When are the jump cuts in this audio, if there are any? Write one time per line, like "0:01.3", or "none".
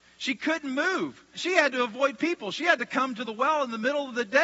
0:01.3